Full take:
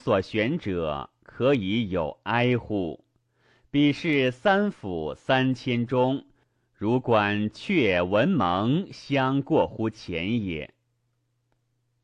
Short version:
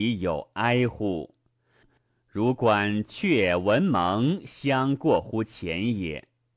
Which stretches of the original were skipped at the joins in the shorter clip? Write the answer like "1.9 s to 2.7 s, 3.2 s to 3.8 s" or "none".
3.5 s to 6.3 s